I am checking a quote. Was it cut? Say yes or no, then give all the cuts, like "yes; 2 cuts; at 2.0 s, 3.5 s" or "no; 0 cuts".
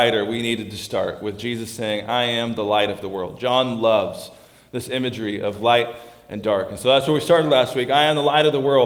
no; 0 cuts